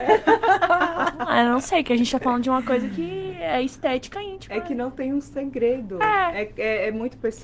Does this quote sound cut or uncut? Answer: uncut